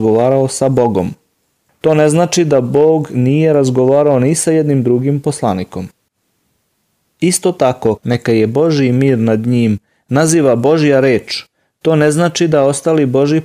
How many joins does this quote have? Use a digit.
1